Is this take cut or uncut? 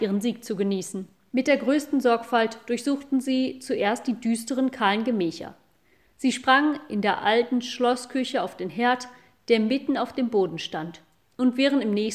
uncut